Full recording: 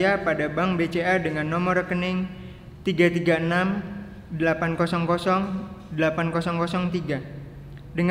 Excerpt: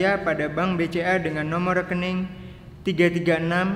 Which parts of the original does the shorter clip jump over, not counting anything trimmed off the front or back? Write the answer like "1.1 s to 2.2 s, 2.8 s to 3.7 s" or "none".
none

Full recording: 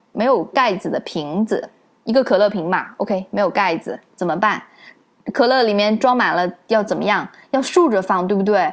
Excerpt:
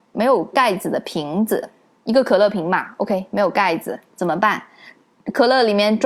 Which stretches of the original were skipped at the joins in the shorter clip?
none

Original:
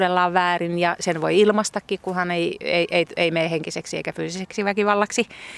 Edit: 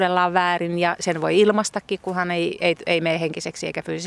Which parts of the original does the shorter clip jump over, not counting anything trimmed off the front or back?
2.6 s to 2.9 s

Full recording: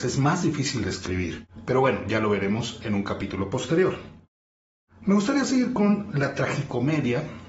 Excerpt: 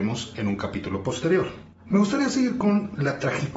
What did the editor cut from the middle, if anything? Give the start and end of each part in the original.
4.2 s to 4.9 s

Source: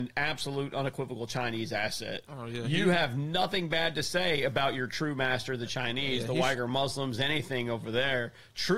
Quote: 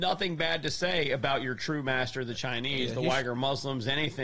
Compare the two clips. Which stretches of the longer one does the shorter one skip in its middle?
none

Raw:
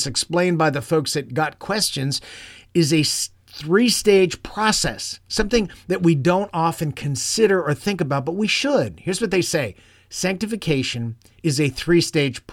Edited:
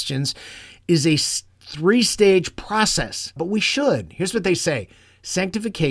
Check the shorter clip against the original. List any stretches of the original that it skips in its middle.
5.2 s to 8.2 s

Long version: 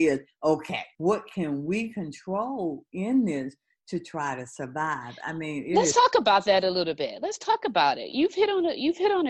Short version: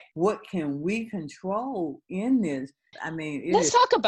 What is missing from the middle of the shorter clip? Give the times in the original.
3.8 s to 5.2 s

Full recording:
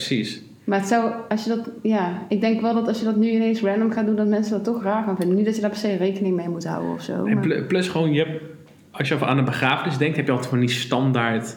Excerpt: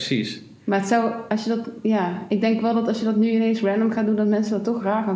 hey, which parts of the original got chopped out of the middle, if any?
none

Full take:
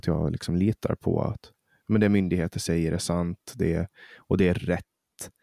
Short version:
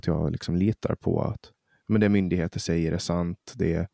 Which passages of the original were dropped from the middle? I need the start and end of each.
none

